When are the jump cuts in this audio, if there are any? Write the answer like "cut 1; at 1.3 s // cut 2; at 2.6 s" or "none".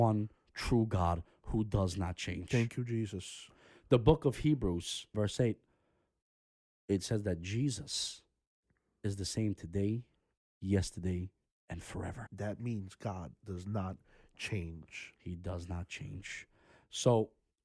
cut 1; at 5.1 s // cut 2; at 12.3 s